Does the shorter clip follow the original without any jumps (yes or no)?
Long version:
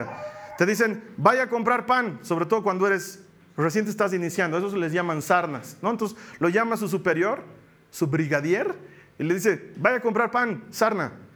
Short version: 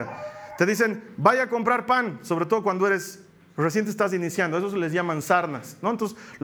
yes